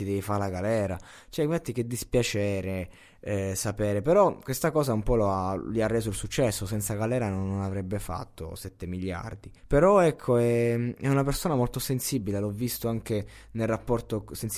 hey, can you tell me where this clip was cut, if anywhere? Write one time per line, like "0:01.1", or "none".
0:09.6